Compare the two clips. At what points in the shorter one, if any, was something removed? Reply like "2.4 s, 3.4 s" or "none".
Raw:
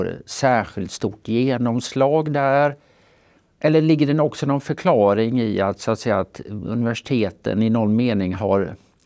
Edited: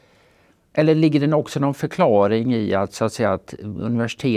none

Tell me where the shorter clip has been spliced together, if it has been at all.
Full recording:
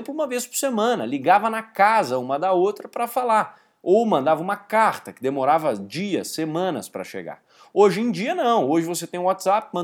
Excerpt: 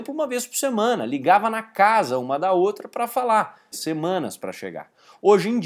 3.7 s

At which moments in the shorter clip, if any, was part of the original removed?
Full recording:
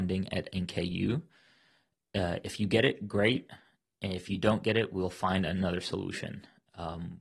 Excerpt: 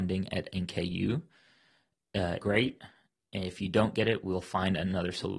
2.4 s

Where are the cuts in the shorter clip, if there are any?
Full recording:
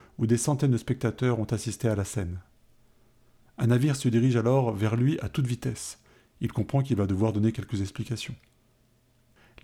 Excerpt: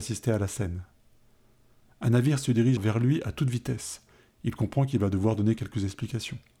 2.8 s

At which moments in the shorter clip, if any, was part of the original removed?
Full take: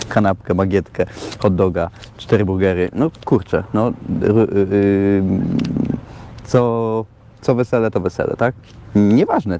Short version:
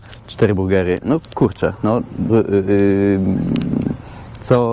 2.3 s

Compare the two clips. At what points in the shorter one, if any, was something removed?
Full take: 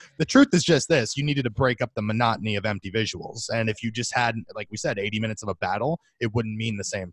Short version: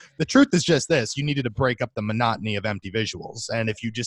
none

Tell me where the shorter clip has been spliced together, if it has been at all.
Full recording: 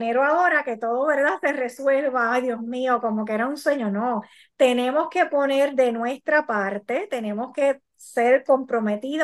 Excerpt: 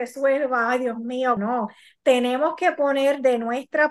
1.4 s

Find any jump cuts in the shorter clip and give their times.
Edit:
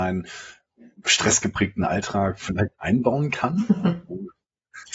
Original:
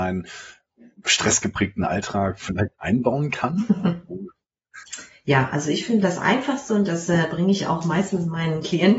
none

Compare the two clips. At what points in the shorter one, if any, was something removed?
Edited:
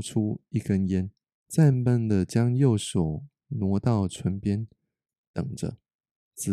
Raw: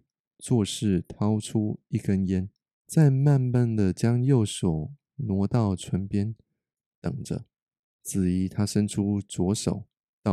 1.7 s

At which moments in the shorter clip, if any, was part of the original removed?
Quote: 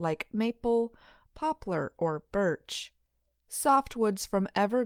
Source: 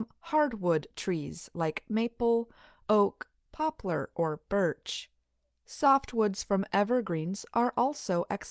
1.3 s

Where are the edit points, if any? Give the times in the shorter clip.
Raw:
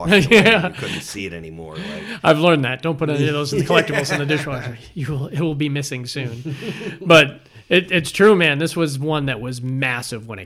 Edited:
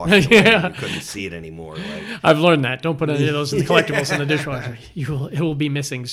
none

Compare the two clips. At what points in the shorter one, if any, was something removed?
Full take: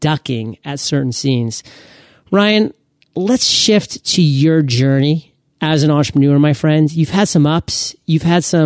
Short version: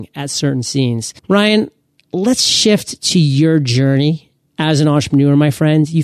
1.2 s

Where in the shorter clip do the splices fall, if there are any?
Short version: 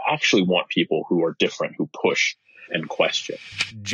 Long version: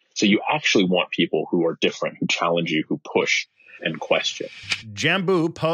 1.8 s

